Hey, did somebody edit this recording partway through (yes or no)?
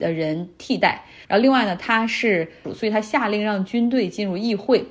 yes